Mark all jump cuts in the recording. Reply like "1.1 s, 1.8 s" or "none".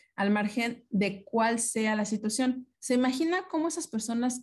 2.7 s